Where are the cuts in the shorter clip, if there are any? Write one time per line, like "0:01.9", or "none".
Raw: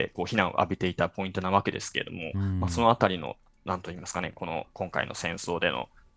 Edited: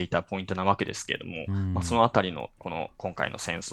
0:02.6